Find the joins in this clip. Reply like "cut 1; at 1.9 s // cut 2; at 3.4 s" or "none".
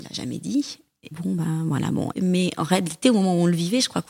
cut 1; at 1.1 s // cut 2; at 2.1 s